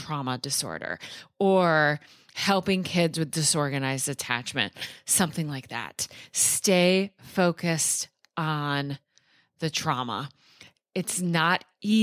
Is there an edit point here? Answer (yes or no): no